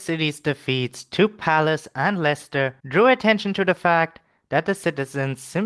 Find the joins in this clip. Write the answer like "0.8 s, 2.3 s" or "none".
2.8 s